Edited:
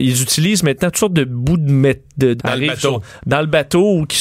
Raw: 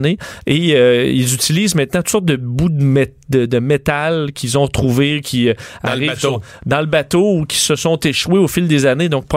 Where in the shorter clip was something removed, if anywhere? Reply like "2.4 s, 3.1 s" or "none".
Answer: 2.4 s